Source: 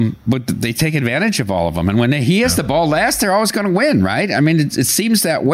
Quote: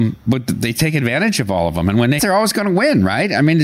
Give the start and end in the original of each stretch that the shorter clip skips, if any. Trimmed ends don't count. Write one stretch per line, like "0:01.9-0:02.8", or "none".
0:02.2-0:03.2